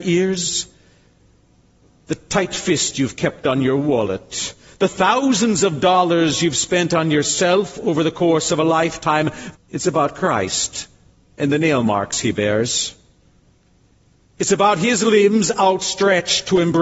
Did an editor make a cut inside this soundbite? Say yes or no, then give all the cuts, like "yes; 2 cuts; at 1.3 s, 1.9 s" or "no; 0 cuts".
yes; 1 cut; at 9.5 s